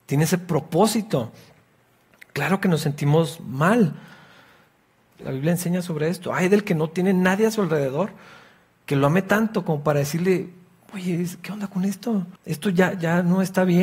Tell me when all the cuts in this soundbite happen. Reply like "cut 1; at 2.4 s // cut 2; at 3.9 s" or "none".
cut 1; at 5.1 s // cut 2; at 12.4 s

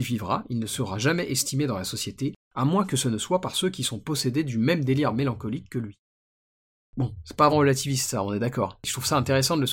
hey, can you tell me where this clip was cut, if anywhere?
cut 1; at 7.5 s

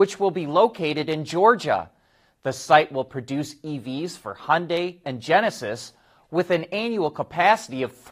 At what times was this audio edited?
cut 1; at 5.0 s

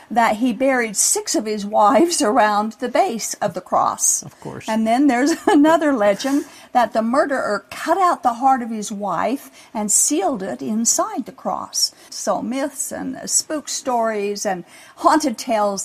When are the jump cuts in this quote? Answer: cut 1; at 12.1 s

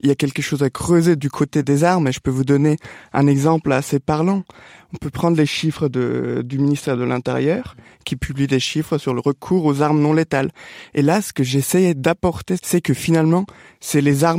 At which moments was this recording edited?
cut 1; at 10.9 s // cut 2; at 12.6 s

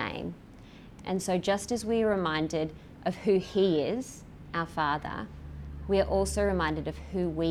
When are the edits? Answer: cut 1; at 1.0 s

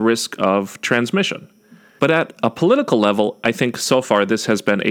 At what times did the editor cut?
none

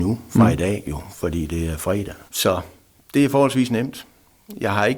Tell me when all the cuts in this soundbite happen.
cut 1; at 2.3 s

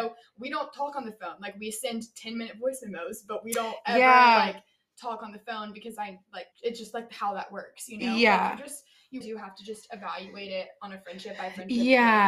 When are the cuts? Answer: cut 1; at 6.5 s // cut 2; at 9.2 s

